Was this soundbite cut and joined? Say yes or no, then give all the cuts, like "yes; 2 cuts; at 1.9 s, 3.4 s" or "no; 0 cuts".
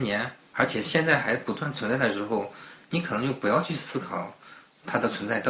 no; 0 cuts